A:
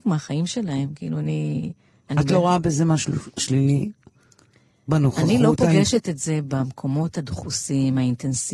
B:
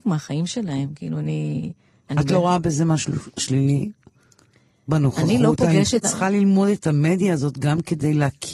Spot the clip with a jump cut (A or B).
B